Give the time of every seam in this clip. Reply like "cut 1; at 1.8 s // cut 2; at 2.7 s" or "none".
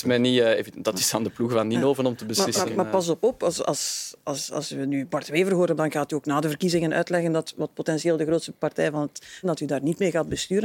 cut 1; at 5.8 s // cut 2; at 9.4 s